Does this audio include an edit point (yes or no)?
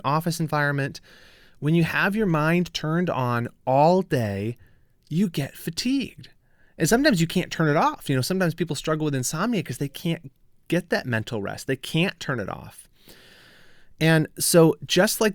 no